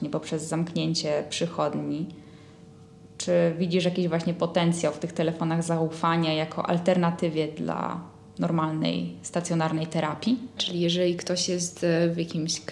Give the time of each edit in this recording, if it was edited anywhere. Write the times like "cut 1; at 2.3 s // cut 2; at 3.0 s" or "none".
cut 1; at 10.6 s